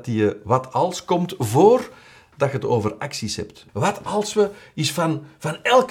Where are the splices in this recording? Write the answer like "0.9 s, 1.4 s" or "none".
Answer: 3.7 s